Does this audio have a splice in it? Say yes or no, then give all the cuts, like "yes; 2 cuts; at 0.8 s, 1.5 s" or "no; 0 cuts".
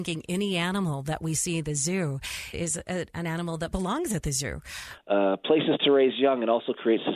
yes; 2 cuts; at 2.5 s, 5.0 s